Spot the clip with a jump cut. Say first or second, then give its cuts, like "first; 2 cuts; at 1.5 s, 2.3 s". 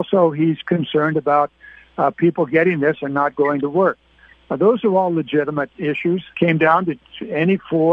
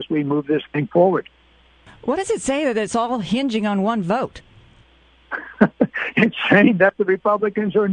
first; 1 cut; at 6.3 s